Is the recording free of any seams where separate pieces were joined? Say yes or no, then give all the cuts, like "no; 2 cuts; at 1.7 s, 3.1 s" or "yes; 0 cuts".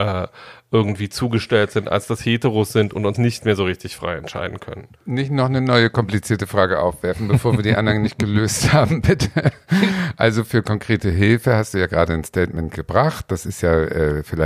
no; 1 cut; at 3.1 s